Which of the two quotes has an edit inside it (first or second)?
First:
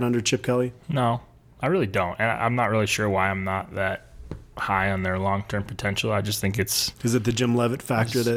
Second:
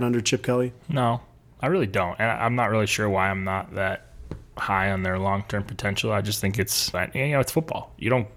second